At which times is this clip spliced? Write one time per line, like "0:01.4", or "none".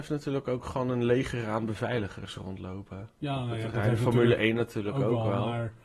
none